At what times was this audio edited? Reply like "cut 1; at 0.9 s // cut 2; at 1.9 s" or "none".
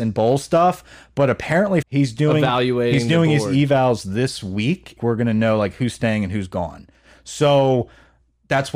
cut 1; at 1.8 s // cut 2; at 5.0 s